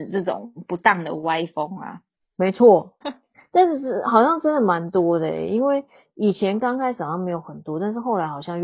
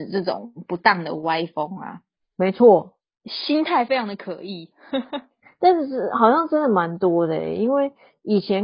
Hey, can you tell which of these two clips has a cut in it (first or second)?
first